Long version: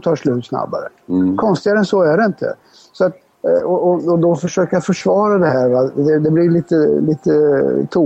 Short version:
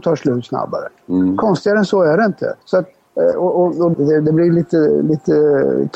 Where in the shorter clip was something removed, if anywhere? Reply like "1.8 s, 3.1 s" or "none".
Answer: 2.6 s, 3.9 s